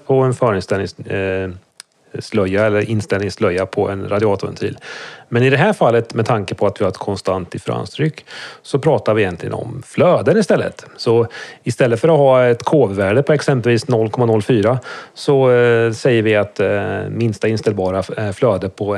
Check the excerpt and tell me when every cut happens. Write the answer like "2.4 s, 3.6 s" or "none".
none